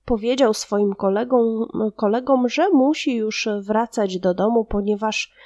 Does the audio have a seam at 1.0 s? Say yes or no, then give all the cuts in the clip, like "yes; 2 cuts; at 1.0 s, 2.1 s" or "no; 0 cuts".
no; 0 cuts